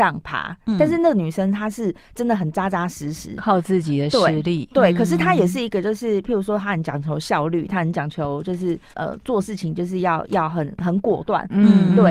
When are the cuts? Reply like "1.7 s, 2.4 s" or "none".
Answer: 8.9 s